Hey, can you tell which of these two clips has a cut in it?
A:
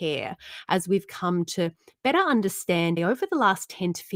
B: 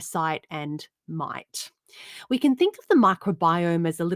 A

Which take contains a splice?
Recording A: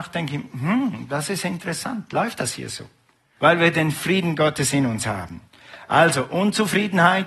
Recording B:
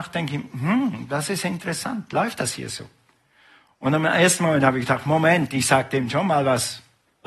A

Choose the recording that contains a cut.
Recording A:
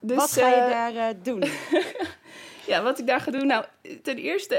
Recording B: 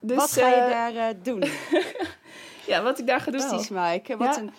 B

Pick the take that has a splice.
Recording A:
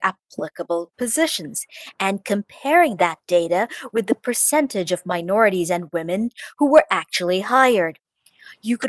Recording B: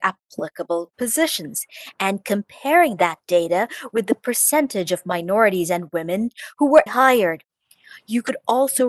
B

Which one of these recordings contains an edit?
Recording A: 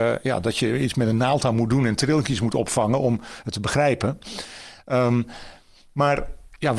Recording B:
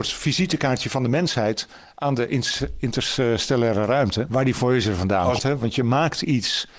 B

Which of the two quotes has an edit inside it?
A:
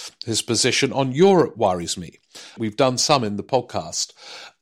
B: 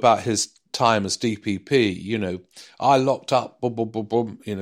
A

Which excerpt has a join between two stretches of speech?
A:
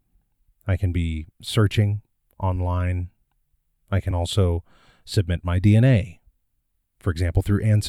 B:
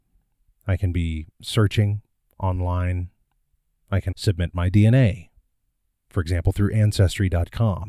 B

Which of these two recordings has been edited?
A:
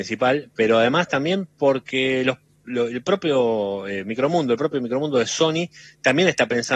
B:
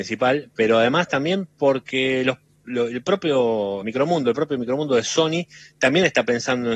B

